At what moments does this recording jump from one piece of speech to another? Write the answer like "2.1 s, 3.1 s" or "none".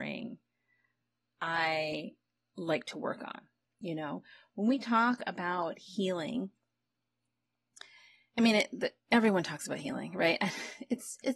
3.6 s